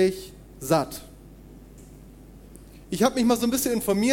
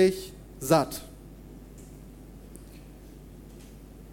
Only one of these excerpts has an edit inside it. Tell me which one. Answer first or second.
first